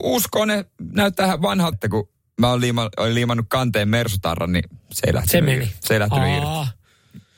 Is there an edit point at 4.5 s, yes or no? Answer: no